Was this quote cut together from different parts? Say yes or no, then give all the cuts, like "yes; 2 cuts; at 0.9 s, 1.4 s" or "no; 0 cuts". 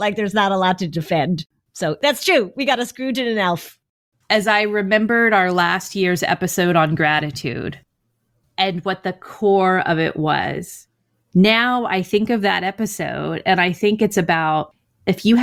no; 0 cuts